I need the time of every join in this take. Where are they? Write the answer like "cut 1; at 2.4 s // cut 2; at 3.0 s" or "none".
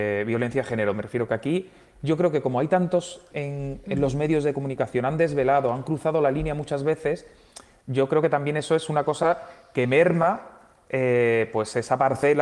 cut 1; at 3.3 s